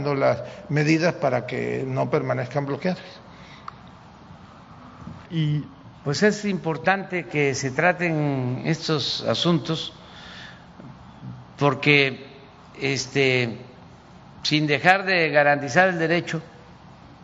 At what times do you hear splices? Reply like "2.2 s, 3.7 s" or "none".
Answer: 5.2 s